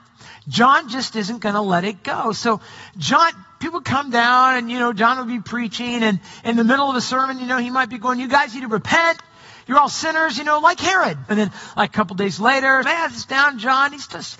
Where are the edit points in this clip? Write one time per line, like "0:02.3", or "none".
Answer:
0:11.3
0:12.8